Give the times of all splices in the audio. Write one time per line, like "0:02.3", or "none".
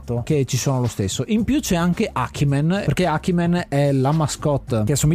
0:02.8